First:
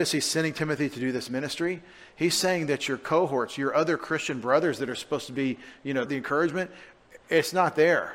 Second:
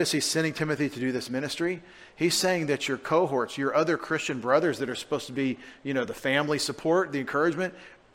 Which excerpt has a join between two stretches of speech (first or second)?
first